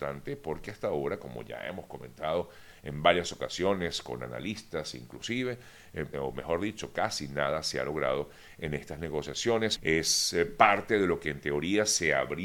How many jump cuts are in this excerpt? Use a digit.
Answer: 2